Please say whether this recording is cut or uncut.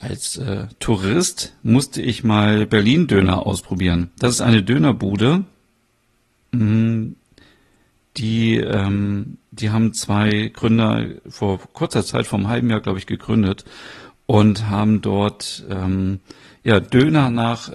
uncut